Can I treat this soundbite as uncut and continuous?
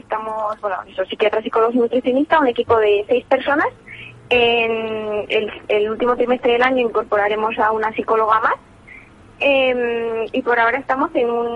yes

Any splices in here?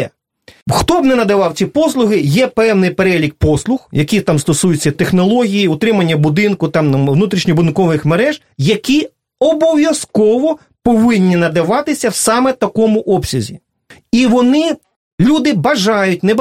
yes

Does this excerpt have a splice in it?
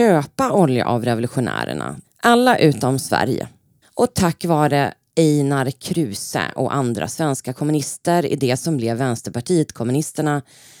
yes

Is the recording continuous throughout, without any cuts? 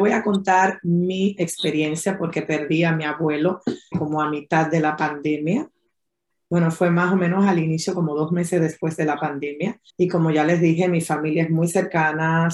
no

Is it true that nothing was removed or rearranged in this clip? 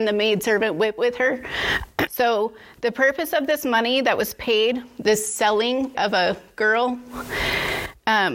no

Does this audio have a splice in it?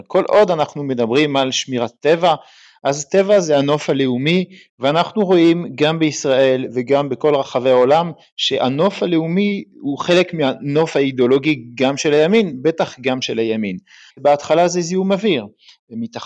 yes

